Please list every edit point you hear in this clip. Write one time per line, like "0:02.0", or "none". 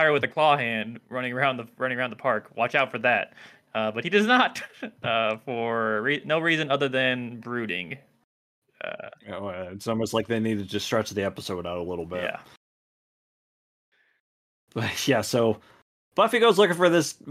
none

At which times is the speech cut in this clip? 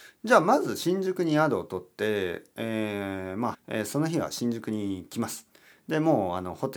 0:03.5

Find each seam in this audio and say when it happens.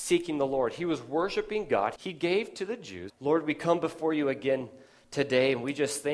0:02.0
0:03.1

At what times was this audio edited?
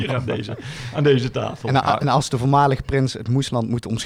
none

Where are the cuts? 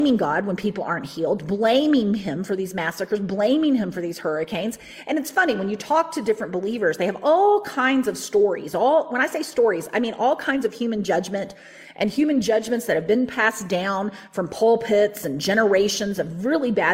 none

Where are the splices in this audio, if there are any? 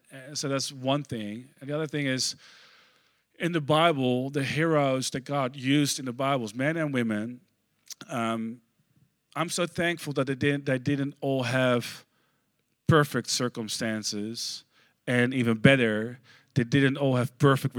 none

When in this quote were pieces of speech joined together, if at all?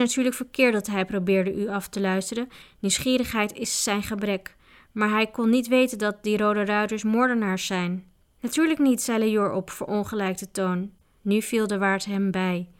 0:11.2

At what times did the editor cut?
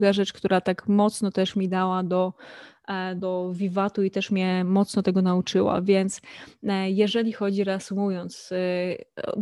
0:03.2

